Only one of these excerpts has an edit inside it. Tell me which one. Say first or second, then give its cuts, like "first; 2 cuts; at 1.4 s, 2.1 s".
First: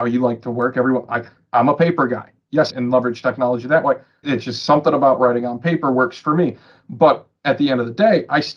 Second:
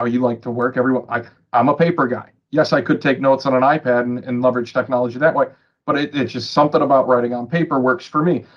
first; 2 cuts; at 2.7 s, 4.2 s